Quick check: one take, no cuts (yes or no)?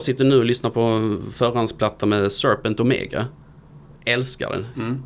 yes